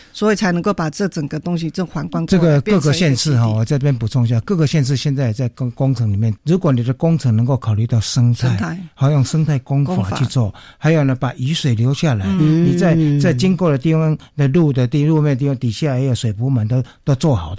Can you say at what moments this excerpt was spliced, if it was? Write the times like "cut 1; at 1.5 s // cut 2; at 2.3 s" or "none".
cut 1; at 6.4 s